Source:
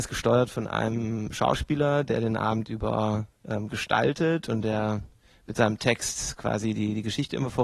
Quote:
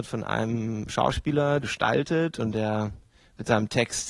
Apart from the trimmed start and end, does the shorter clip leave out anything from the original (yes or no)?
yes